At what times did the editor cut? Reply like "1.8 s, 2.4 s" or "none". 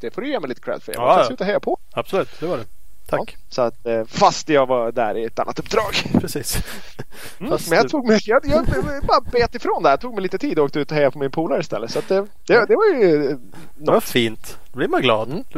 none